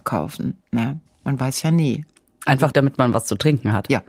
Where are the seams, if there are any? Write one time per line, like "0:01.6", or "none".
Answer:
0:02.7